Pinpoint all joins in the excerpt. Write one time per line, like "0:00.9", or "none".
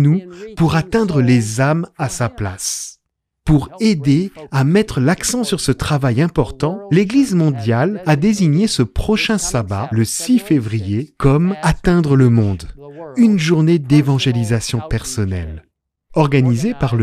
none